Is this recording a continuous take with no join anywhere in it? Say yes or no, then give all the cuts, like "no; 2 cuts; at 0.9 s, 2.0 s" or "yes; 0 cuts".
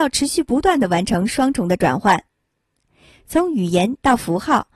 yes; 0 cuts